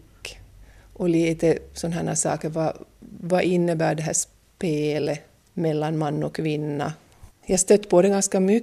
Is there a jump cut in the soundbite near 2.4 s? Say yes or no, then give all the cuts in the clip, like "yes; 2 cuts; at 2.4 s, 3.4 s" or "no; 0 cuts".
no; 1 cut; at 7.3 s